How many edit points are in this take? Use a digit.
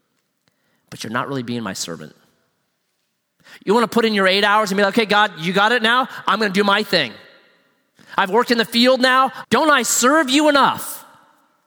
1